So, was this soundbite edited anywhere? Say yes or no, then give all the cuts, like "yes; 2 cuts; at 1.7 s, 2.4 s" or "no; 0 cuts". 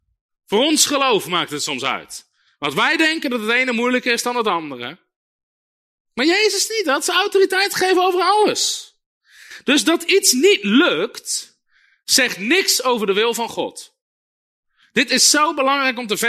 no; 0 cuts